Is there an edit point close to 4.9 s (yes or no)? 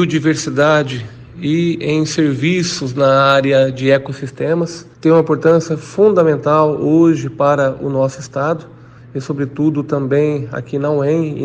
yes